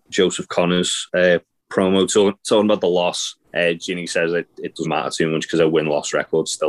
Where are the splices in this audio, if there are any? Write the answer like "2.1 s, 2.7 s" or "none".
3.4 s, 4.8 s